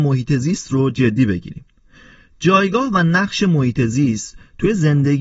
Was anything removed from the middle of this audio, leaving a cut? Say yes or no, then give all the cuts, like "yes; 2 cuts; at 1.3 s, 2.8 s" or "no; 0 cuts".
no; 0 cuts